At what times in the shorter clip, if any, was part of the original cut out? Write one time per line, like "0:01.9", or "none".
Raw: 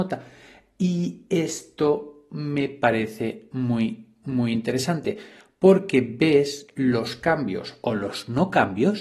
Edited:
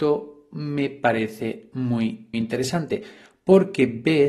0:02.3